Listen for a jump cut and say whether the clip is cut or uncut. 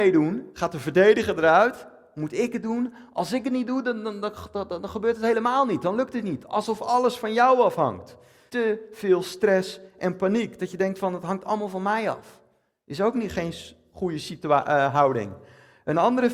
cut